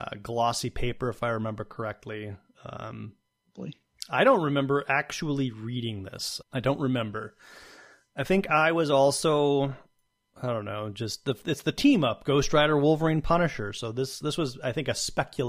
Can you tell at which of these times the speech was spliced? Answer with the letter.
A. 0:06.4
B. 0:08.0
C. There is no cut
A